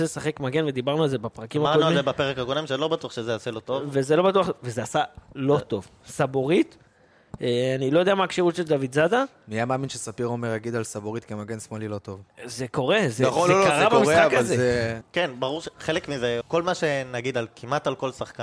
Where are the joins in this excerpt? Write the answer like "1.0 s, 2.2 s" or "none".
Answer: 15.0 s, 16.4 s